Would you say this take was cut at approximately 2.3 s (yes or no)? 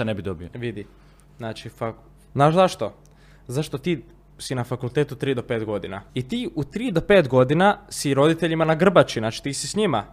yes